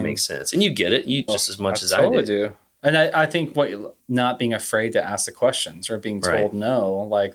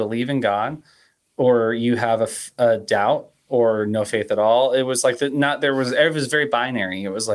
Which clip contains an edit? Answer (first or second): first